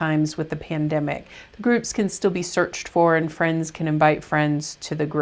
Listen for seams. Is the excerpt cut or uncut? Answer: cut